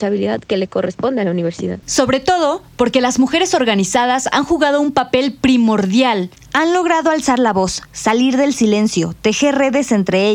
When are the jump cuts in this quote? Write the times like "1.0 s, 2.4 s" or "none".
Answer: 1.8 s, 6.4 s